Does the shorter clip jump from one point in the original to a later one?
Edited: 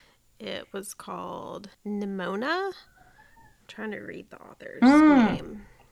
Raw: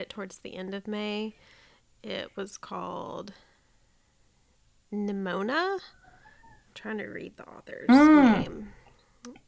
yes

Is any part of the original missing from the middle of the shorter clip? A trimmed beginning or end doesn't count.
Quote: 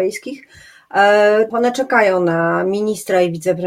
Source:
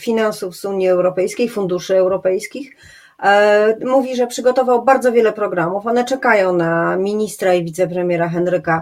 yes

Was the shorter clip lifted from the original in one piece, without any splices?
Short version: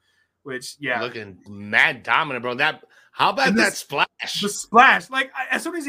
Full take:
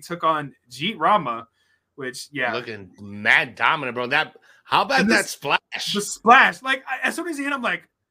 yes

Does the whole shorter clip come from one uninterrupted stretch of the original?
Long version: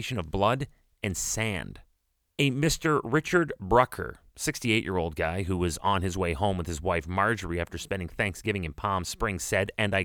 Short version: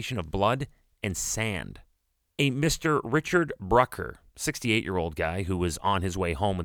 yes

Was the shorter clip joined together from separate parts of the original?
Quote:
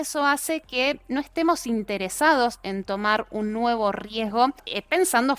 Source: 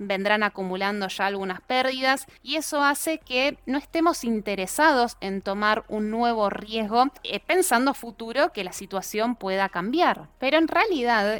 no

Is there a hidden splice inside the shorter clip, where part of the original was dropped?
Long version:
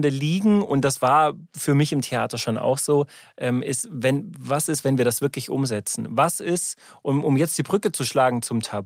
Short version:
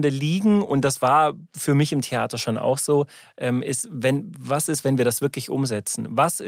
no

